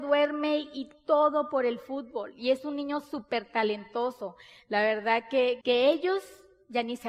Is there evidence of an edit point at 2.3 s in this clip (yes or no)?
no